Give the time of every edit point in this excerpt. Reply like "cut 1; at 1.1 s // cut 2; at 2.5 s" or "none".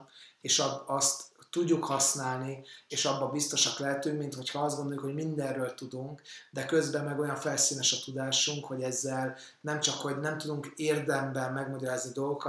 cut 1; at 2.9 s